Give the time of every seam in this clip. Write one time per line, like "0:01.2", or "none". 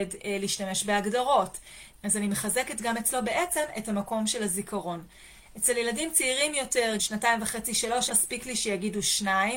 0:01.9
0:07.0
0:08.1